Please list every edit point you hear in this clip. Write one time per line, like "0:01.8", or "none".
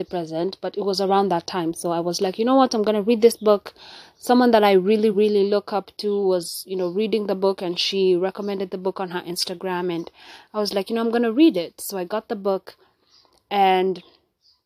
0:05.1